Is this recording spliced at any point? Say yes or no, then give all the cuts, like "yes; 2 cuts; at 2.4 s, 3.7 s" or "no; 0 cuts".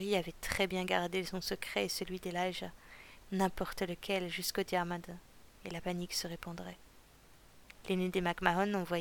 yes; 1 cut; at 3.2 s